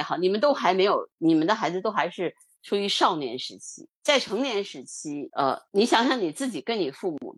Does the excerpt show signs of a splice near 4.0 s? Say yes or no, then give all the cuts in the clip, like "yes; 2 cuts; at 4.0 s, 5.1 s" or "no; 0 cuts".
yes; 2 cuts; at 4.0 s, 5.3 s